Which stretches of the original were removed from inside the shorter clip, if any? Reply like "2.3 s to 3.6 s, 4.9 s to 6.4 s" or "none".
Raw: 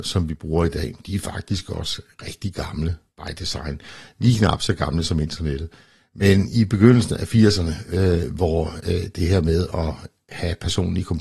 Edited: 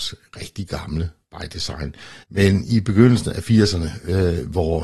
4.1 s to 6.1 s